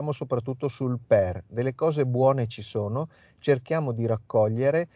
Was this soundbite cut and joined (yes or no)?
no